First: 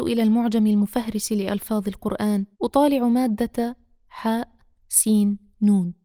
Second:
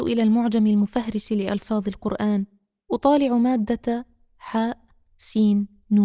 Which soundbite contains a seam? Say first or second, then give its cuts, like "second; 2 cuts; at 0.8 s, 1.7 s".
first; 1 cut; at 2.5 s